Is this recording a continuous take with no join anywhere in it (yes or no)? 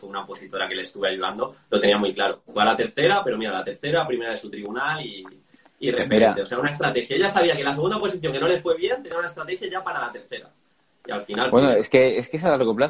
yes